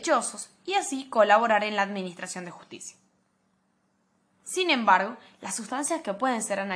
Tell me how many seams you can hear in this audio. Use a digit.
0